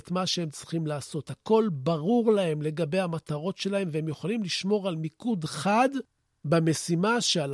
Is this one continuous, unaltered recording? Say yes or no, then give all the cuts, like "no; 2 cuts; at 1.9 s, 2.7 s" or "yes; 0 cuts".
yes; 0 cuts